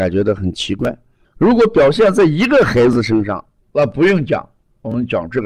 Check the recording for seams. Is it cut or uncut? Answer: cut